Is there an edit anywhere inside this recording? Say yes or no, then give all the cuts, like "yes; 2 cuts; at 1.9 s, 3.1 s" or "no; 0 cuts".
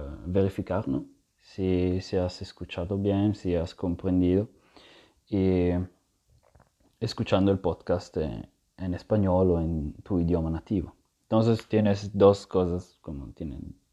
no; 0 cuts